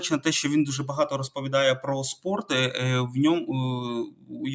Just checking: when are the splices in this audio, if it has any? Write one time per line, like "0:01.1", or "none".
none